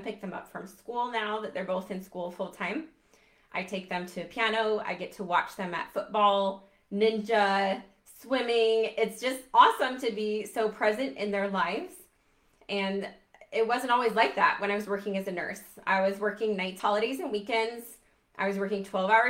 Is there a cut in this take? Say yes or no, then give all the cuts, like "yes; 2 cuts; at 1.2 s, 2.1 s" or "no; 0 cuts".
no; 0 cuts